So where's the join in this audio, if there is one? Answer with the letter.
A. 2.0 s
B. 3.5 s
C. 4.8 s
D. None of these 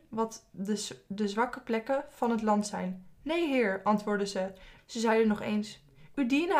C